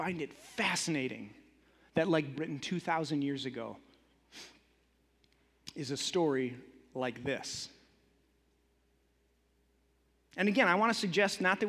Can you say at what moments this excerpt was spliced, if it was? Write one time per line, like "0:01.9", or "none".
0:02.3

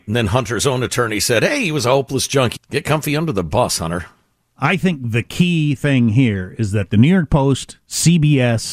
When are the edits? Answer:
0:02.6

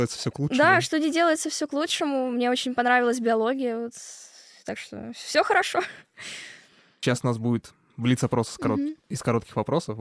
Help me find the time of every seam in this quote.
none

